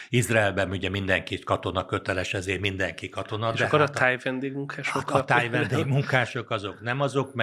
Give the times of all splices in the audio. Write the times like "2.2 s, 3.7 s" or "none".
none